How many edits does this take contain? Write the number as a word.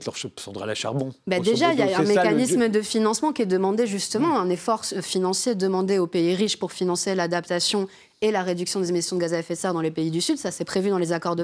zero